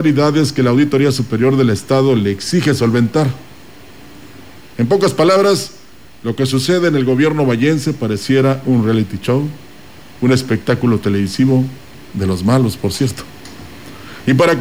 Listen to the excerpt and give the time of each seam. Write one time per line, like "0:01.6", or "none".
0:04.6